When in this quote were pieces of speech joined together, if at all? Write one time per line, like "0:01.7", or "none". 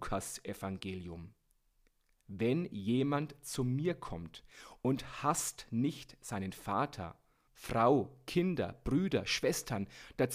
0:07.5